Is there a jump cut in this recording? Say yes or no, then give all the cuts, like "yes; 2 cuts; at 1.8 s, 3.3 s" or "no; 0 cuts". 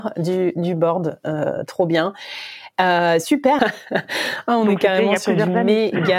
yes; 1 cut; at 3.6 s